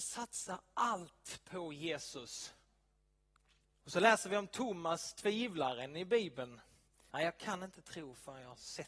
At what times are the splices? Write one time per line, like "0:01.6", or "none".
0:03.7
0:07.1